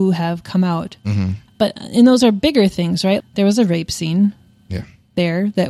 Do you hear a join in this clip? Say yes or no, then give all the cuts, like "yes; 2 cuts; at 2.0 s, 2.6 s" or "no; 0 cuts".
yes; 2 cuts; at 1.5 s, 3.2 s